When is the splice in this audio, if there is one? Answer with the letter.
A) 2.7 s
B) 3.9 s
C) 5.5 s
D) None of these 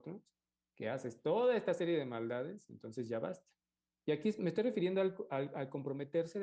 B